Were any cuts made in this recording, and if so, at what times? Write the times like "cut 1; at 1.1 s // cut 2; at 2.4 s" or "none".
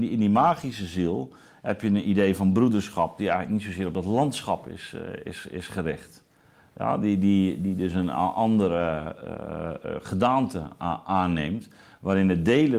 none